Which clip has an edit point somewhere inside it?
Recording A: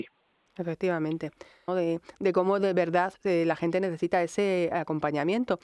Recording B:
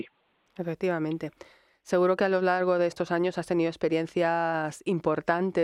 A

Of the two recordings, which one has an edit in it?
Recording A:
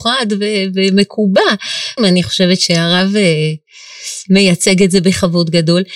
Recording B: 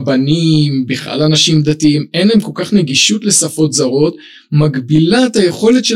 A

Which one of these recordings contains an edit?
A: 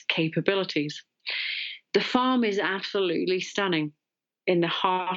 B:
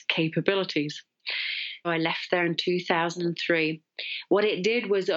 B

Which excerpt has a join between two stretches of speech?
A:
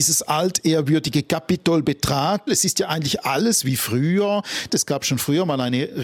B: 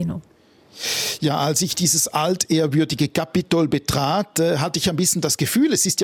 A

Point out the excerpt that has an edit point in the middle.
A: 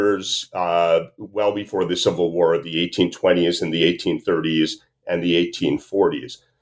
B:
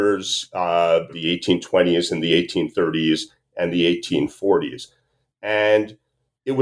B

